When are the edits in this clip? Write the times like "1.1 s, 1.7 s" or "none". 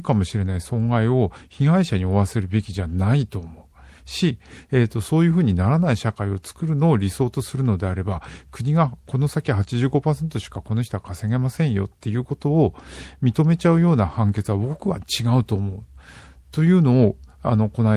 none

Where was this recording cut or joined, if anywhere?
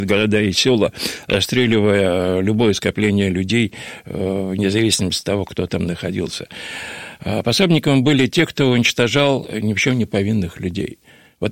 none

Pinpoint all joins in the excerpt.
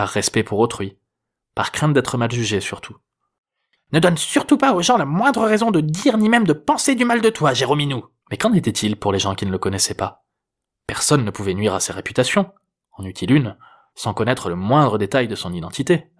3.8 s, 8.2 s

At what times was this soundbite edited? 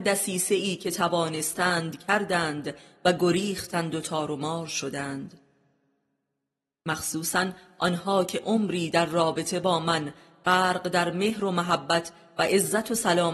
none

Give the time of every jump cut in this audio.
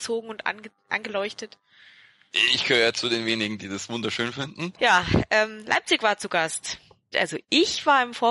4.7 s, 7.1 s

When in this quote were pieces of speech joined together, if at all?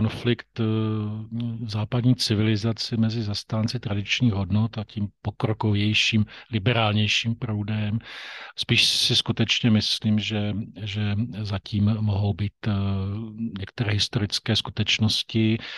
8.5 s

